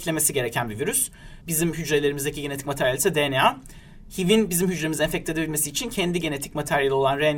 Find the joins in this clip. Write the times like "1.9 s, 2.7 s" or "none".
1.4 s